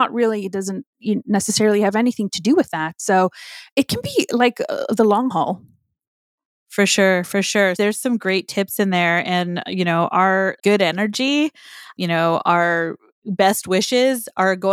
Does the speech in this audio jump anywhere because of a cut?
yes; 2 cuts; at 7.8 s, 10.6 s

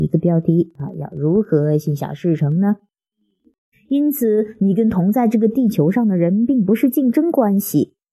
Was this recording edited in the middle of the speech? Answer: yes; 1 cut; at 3.7 s

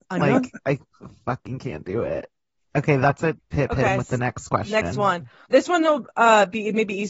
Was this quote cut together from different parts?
yes; 1 cut; at 3.4 s

